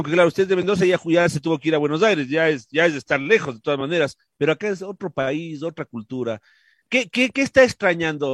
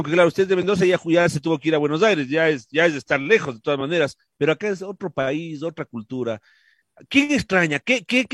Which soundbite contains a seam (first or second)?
first